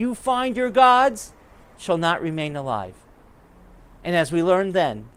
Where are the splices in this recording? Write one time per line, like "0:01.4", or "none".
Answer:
none